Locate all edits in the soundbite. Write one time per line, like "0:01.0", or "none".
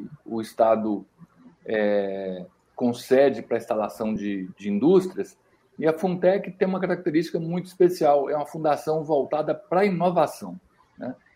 none